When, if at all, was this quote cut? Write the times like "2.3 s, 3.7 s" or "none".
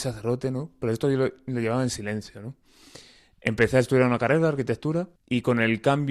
5.2 s

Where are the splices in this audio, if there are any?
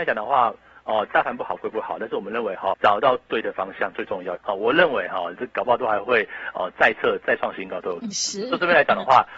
2.7 s, 4.3 s, 5.4 s

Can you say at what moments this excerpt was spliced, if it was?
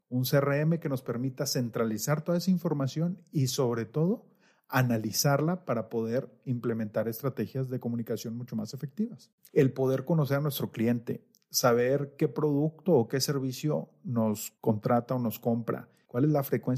9.5 s

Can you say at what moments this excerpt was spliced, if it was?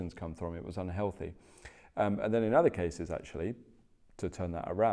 none

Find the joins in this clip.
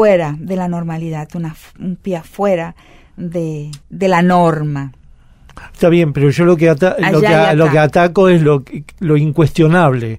3.8 s

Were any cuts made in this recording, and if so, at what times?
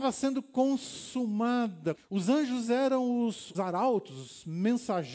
1.9 s, 3.5 s

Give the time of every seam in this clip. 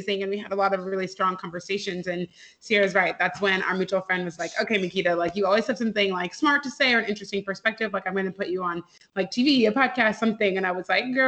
none

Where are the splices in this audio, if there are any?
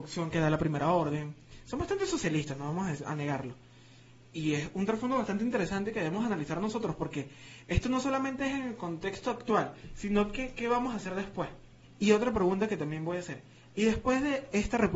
11.8 s

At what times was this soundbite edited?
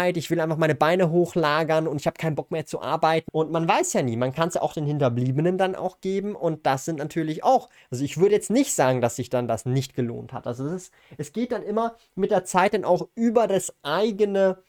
3.3 s

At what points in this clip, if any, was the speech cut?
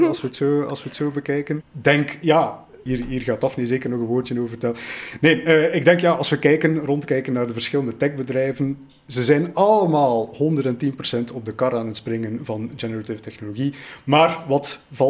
1.6 s, 2.9 s

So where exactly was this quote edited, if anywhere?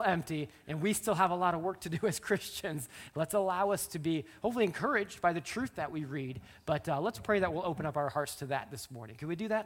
3.1 s

